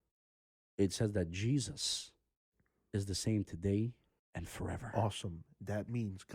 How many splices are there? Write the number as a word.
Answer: one